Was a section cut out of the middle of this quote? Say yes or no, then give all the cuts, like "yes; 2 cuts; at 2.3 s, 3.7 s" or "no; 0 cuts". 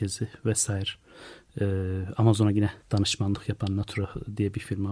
yes; 1 cut; at 2.8 s